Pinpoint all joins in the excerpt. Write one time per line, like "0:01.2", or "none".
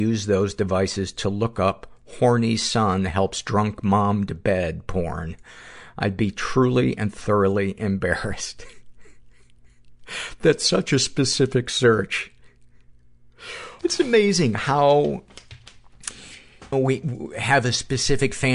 0:13.8
0:16.7